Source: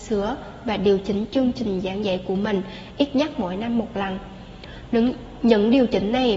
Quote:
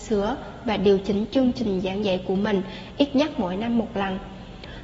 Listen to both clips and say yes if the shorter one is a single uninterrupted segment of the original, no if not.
yes